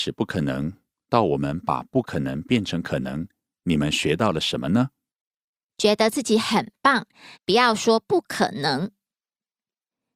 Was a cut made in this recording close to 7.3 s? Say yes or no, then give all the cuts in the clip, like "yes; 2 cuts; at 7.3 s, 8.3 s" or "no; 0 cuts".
yes; 2 cuts; at 5.7 s, 7.3 s